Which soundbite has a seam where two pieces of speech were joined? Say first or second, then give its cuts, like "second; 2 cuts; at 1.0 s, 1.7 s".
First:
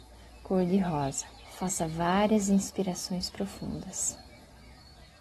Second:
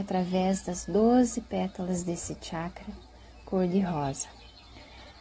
first; 1 cut; at 1.4 s